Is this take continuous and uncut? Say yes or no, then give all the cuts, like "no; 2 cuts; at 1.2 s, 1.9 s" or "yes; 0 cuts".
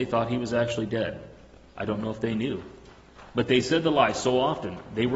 yes; 0 cuts